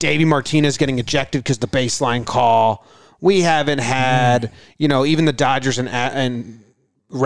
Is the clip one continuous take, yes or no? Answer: yes